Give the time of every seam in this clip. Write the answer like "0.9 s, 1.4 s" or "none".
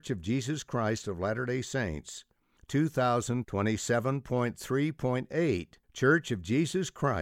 3.4 s, 5.8 s